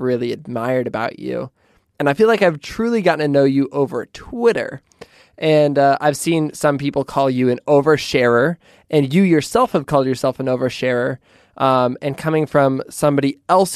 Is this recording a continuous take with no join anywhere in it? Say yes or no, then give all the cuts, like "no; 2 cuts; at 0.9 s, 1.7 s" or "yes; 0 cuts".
yes; 0 cuts